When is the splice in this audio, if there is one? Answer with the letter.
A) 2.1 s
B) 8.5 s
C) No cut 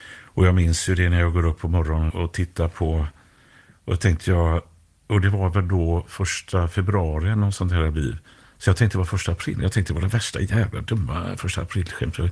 A